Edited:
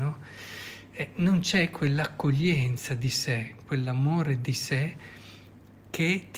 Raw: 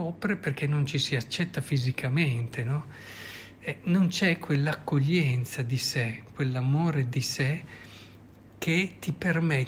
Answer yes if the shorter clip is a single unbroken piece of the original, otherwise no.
yes